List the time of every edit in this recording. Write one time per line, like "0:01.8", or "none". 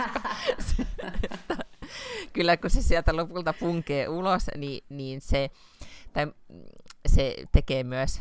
none